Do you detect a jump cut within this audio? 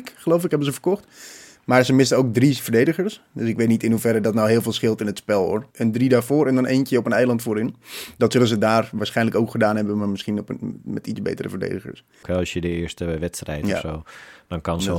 yes; 2 cuts; at 5.7 s, 12.2 s

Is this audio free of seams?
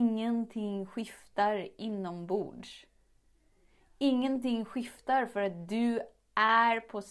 yes; 0 cuts

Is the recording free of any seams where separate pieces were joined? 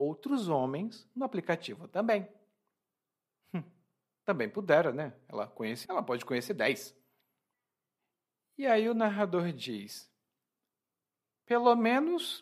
no; 1 cut; at 5.9 s

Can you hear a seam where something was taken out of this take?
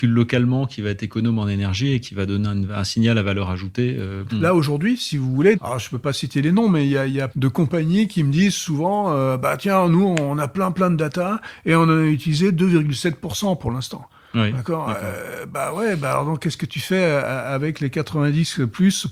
yes; 3 cuts; at 4.3 s, 5.5 s, 7.3 s

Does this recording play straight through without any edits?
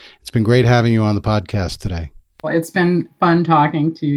no; 1 cut; at 2.4 s

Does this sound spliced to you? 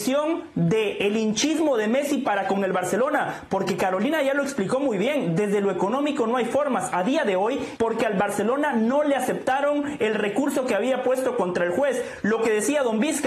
yes; 1 cut; at 7.8 s

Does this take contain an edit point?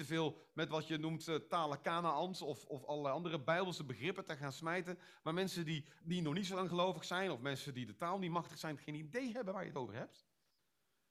yes; 2 cuts; at 2.7 s, 6.0 s

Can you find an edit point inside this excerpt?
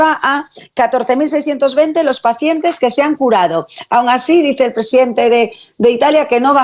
no; 0 cuts

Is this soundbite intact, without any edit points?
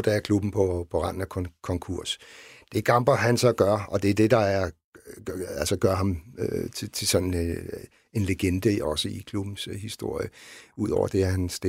yes; 0 cuts

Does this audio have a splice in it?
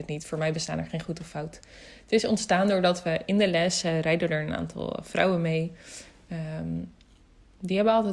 no; 0 cuts

